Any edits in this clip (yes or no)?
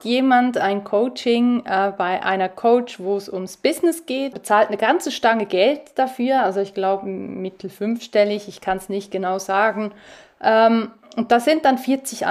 yes